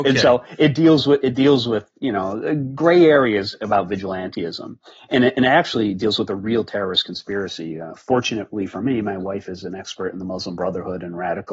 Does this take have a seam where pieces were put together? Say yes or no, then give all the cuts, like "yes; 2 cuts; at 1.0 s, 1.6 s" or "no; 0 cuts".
no; 0 cuts